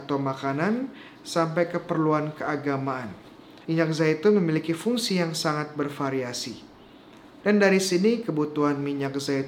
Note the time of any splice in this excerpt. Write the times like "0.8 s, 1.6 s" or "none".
3.6 s, 7.4 s

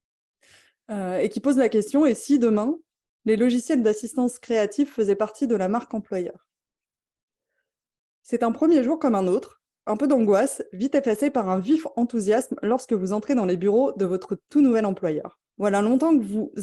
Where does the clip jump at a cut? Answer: 15.5 s

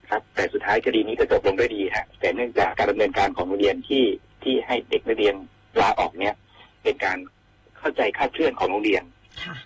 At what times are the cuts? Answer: 2.7 s

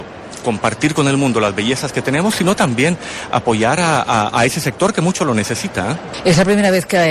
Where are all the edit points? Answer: none

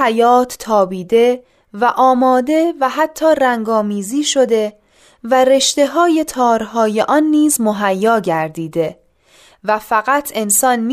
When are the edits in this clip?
none

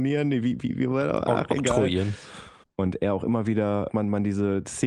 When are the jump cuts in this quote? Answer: 2.6 s, 3.9 s

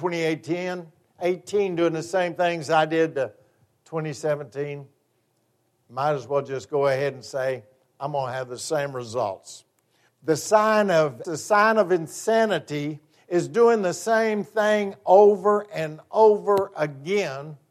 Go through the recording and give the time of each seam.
10.1 s, 11.2 s

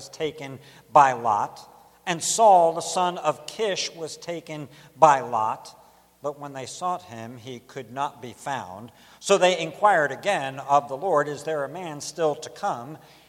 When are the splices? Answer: none

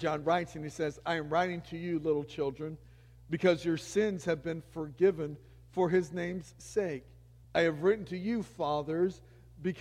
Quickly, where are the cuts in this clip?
7.4 s

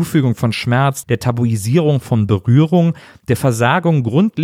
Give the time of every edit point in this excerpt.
1.0 s

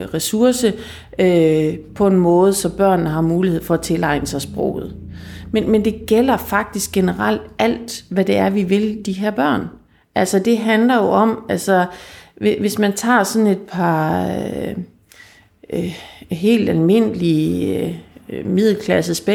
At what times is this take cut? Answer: none

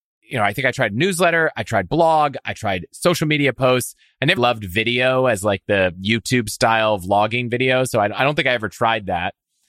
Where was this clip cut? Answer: 4.4 s

